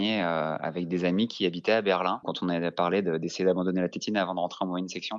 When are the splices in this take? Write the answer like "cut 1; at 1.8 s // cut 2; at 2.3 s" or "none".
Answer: none